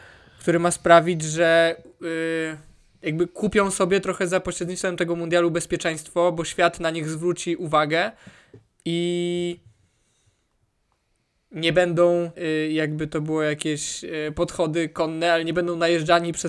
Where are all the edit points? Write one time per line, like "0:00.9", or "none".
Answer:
0:12.3